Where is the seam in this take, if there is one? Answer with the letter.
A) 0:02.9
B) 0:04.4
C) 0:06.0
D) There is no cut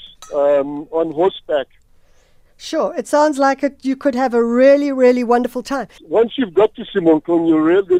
C